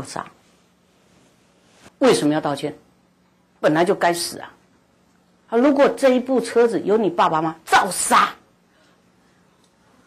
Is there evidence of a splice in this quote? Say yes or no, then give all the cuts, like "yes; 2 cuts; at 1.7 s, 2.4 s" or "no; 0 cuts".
yes; 1 cut; at 1.9 s